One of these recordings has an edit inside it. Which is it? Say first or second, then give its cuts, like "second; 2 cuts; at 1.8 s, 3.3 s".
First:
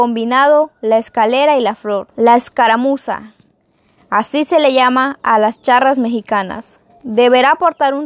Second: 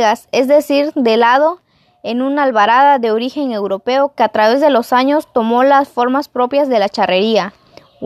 first; 1 cut; at 2.1 s